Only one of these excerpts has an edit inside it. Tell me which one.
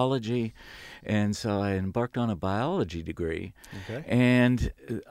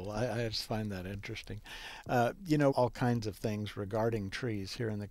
second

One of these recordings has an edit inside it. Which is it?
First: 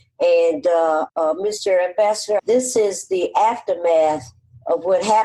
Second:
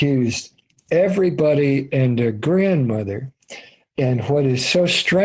first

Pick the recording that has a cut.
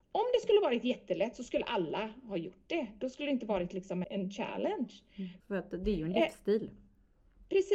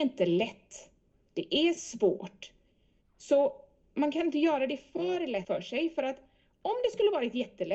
first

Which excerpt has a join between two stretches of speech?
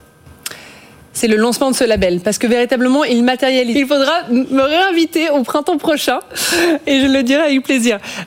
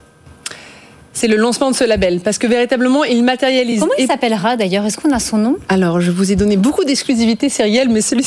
first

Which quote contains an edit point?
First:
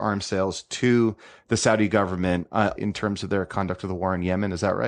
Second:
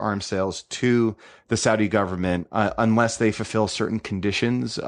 first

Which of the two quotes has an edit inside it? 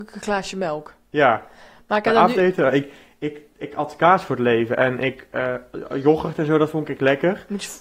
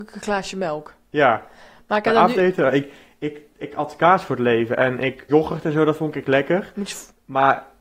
second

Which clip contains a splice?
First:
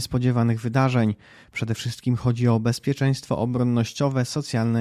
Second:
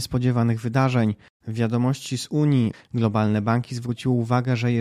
second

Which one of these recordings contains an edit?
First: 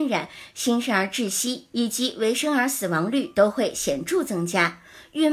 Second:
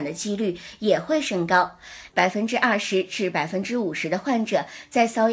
second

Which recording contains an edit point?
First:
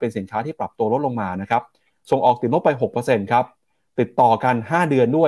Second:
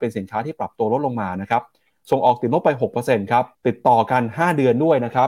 second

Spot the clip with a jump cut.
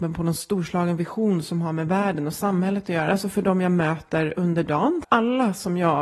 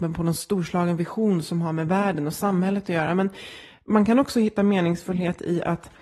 first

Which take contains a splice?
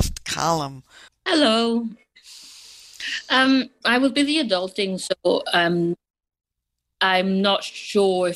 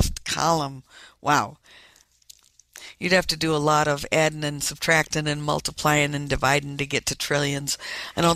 first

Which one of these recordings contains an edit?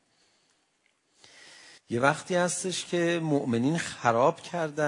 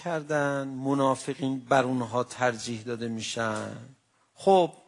first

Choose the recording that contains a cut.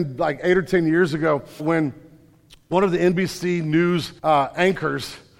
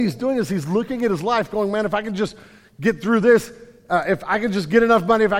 first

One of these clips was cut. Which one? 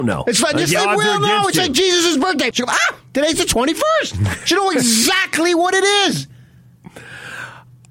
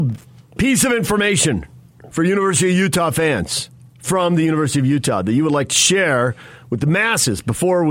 first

